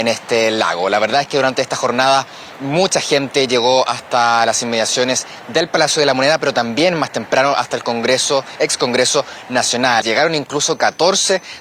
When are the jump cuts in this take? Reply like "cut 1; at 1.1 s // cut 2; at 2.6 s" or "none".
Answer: cut 1; at 10.0 s